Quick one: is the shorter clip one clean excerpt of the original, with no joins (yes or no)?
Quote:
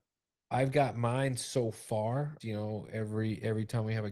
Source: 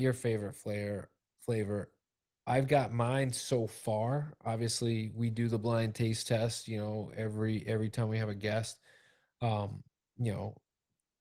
no